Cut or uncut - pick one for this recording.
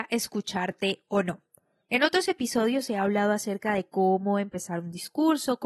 uncut